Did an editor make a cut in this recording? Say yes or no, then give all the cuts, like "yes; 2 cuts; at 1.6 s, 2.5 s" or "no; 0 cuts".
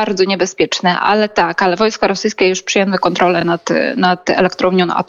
no; 0 cuts